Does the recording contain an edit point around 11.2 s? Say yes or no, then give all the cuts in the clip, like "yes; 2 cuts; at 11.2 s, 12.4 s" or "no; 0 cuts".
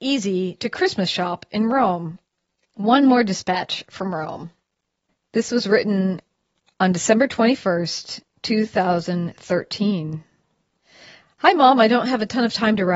no; 2 cuts; at 2.6 s, 8.3 s